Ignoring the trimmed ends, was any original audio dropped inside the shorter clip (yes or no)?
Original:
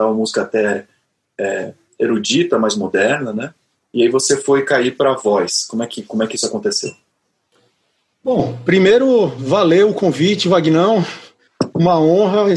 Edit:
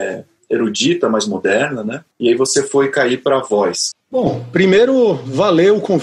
yes